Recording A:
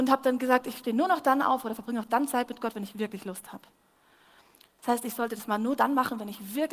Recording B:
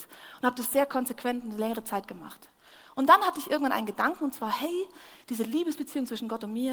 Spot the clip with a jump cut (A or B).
A